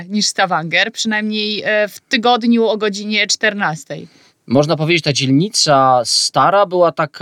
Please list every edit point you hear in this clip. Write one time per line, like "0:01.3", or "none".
none